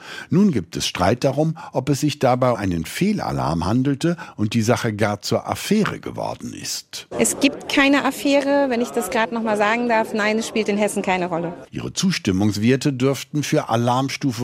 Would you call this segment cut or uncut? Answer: cut